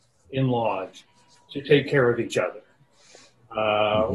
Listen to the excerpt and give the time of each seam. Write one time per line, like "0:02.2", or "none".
none